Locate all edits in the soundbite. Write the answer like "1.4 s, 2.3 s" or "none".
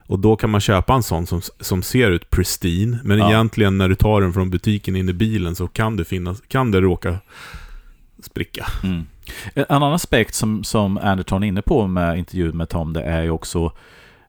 none